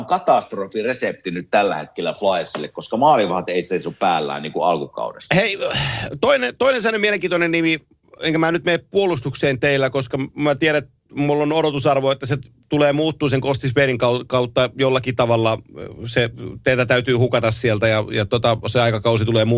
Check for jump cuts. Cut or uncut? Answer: uncut